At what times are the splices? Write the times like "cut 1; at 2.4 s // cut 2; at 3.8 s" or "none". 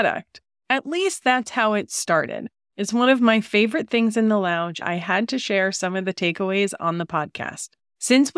cut 1; at 2.7 s // cut 2; at 4.8 s